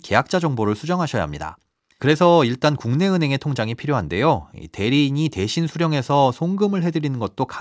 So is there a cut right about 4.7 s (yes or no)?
no